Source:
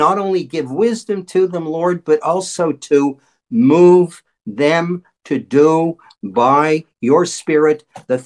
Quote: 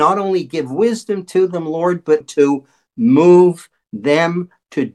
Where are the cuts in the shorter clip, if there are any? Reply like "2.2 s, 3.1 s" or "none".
2.2 s